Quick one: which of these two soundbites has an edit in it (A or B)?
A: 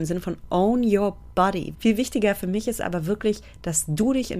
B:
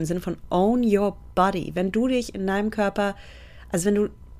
A